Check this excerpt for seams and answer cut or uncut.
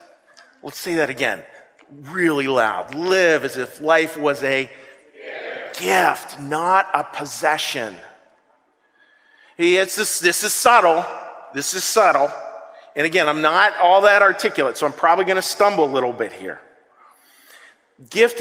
uncut